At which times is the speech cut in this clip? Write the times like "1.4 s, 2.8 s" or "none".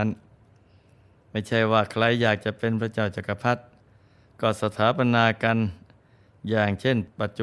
none